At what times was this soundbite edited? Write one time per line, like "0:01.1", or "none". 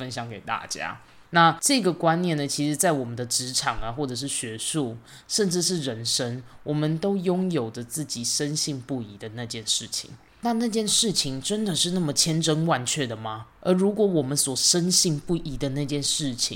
none